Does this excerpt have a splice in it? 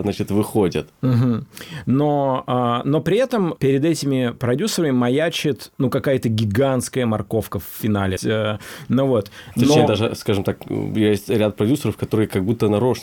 yes; 1 cut; at 8.2 s

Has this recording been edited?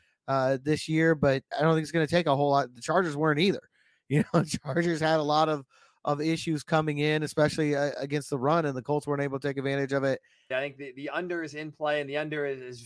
yes; 2 cuts; at 1.5 s, 10.5 s

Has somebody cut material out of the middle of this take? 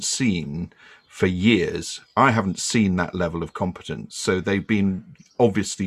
no; 0 cuts

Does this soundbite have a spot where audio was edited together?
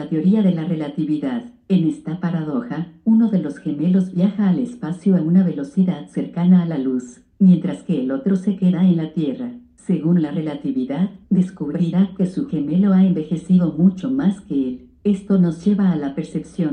yes; 1 cut; at 11.2 s

